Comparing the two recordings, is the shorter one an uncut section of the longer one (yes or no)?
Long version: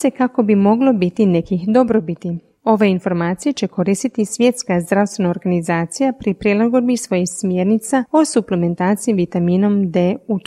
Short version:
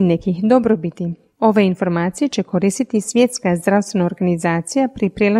yes